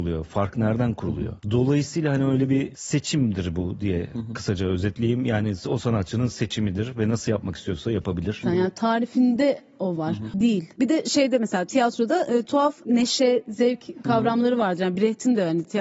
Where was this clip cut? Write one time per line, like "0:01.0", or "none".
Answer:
0:08.4
0:10.3